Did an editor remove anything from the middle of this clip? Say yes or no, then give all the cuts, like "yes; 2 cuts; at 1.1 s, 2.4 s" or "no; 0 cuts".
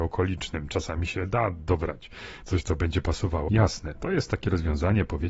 yes; 1 cut; at 3.5 s